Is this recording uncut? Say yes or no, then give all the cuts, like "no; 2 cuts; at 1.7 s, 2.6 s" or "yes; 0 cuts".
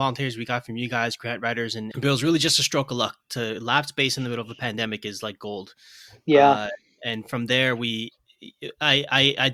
no; 1 cut; at 1.9 s